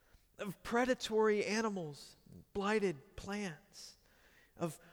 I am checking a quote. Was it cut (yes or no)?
no